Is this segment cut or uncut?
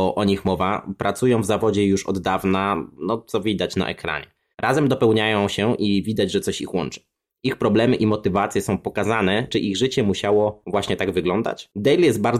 cut